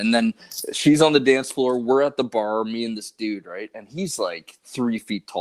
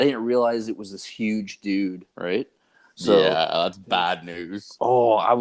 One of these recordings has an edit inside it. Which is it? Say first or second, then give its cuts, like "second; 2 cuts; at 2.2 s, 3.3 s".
second; 1 cut; at 2.1 s